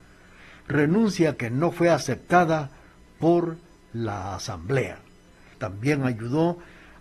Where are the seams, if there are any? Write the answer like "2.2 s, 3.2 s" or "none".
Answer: 5.5 s